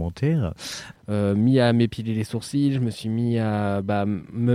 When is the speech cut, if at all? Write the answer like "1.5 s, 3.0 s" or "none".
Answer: 0.9 s